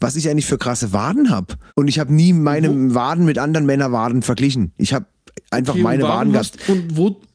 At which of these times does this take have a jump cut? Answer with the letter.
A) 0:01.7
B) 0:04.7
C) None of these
A